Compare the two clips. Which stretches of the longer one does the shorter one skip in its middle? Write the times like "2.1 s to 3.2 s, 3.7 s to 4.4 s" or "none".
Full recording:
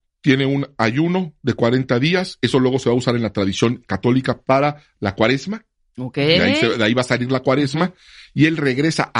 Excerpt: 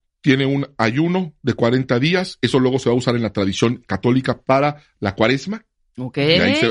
none